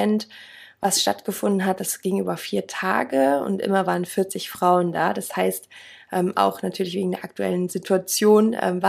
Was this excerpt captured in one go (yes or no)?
yes